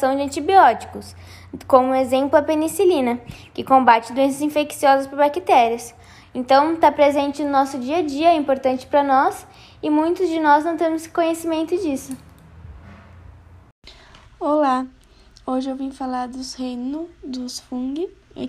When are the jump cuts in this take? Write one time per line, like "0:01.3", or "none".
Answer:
none